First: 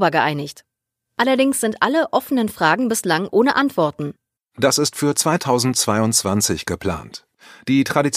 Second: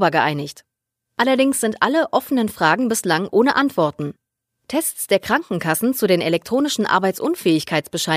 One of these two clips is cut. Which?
first; 1 cut; at 4.4 s

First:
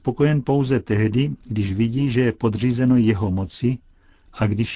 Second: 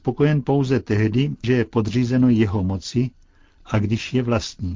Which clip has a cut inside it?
second; 1 cut; at 1.4 s

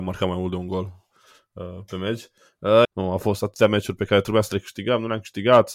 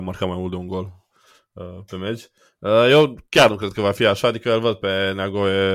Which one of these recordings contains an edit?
first; 1 cut; at 2.8 s

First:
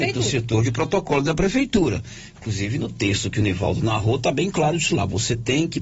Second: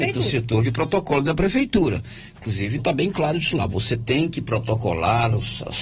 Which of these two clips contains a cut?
second; 1 cut; at 2.8 s

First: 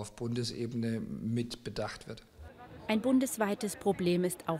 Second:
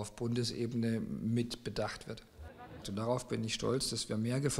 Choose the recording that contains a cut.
second; 1 cut; at 2.8 s

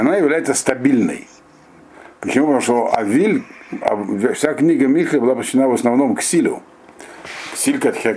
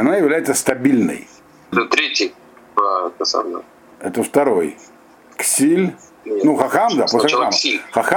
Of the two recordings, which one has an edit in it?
second; 1 cut; at 1.7 s

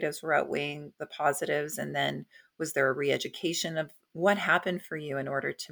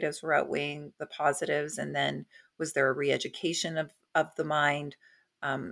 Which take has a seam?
first; 1 cut; at 4.1 s

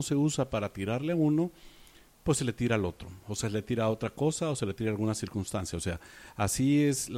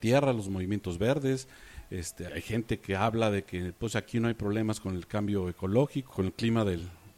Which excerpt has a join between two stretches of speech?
second; 2 cuts; at 2.3 s, 6.1 s

